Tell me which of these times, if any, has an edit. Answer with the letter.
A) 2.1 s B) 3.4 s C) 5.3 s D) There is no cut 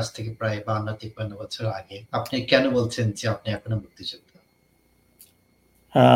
A